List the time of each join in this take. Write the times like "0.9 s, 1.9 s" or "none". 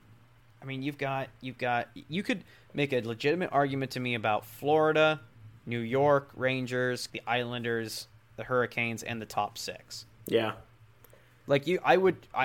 7.1 s